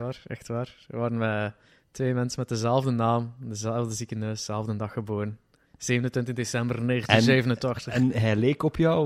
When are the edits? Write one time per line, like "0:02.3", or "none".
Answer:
none